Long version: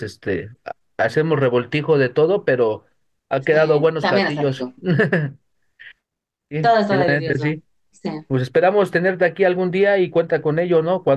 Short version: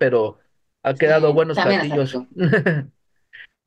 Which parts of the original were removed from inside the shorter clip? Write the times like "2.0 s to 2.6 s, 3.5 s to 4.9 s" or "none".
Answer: none